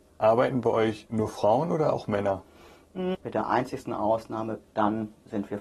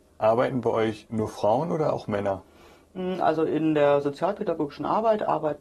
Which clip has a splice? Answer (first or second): first